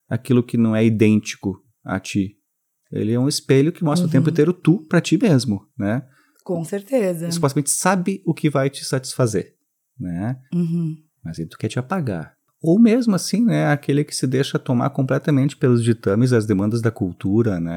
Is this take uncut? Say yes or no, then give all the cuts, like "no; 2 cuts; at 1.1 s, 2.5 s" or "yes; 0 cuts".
no; 1 cut; at 10.5 s